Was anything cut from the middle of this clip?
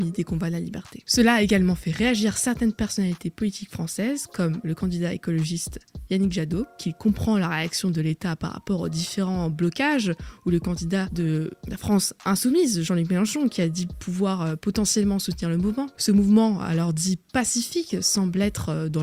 no; 0 cuts

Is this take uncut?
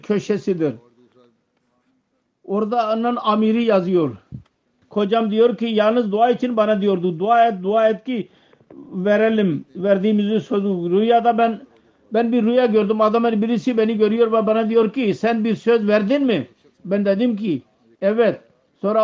no; 1 cut; at 4.8 s

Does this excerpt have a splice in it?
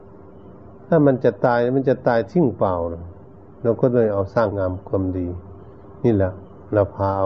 yes; 1 cut; at 4.5 s

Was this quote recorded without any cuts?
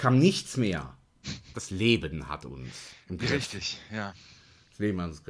no; 1 cut; at 1.5 s

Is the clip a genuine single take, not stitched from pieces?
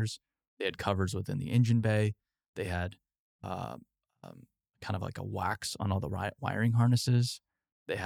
yes; 0 cuts

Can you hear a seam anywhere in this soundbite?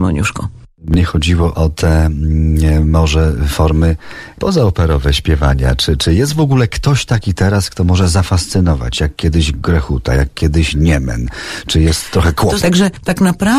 yes; 1 cut; at 12.6 s

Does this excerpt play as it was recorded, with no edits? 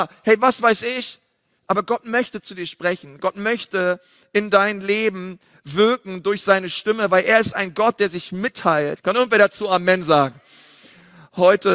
no; 1 cut; at 9.0 s

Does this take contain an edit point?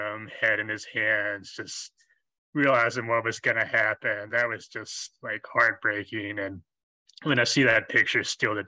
no; 0 cuts

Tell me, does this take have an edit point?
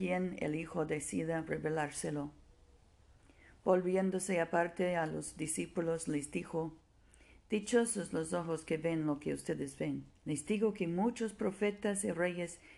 yes; 1 cut; at 10.2 s

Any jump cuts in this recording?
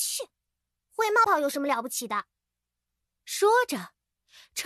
yes; 1 cut; at 1.2 s

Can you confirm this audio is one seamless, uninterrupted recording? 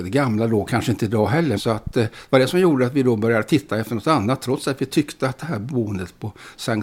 no; 1 cut; at 1.6 s

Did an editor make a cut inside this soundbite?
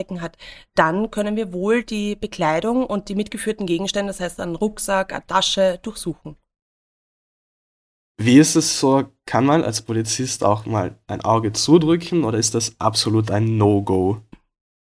no; 0 cuts

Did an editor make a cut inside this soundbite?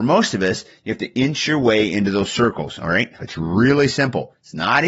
yes; 1 cut; at 3.2 s

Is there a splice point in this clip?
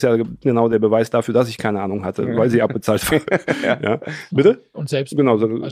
yes; 1 cut; at 4.3 s

